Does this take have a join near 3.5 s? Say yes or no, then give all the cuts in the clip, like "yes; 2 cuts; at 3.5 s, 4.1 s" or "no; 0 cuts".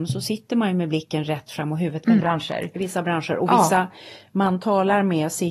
no; 1 cut; at 2.2 s